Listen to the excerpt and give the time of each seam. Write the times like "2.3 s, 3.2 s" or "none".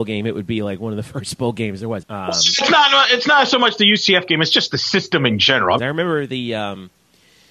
2.0 s, 5.8 s